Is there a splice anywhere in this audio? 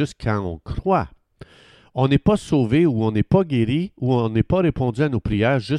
no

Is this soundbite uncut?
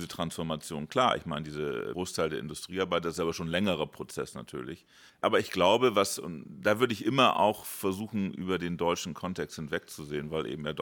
no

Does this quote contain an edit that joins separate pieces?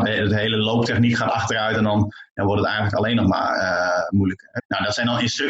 yes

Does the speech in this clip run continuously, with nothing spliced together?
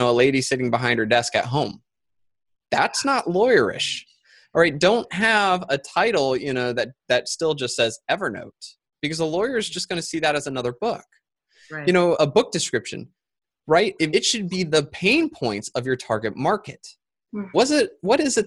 no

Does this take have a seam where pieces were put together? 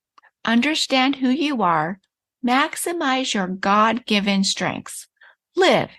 yes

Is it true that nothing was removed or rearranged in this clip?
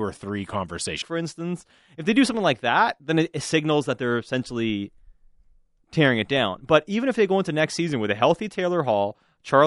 no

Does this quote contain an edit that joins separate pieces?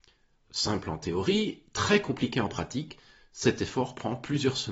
no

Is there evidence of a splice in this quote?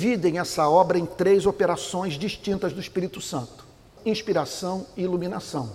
yes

